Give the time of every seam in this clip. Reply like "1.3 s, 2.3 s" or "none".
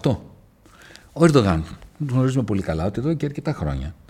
none